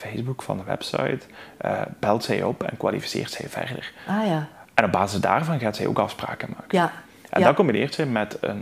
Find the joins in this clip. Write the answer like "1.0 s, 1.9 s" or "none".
none